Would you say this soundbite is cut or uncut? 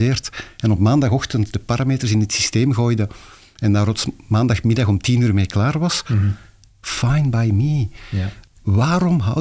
uncut